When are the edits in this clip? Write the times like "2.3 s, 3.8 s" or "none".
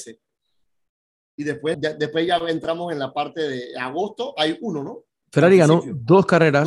1.7 s, 5.2 s